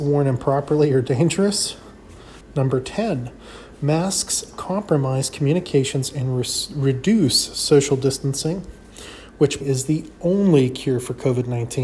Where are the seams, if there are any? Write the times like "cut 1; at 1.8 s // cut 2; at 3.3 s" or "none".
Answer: cut 1; at 2.4 s // cut 2; at 9.6 s